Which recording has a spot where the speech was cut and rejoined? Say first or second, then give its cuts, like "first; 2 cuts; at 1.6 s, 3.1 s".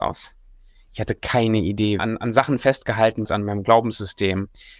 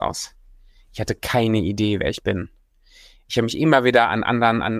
first; 2 cuts; at 2.0 s, 3.3 s